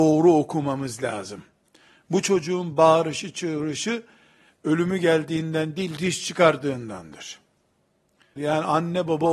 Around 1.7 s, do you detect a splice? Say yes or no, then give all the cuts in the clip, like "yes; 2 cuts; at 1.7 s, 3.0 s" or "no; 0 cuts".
no; 1 cut; at 8.4 s